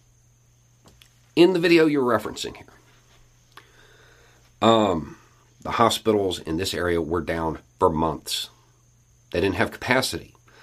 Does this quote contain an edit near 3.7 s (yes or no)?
no